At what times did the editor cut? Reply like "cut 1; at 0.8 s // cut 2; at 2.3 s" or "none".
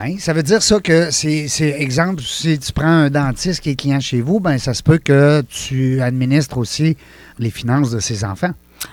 cut 1; at 7.3 s